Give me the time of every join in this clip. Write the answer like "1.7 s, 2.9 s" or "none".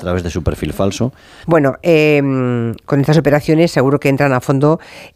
1.4 s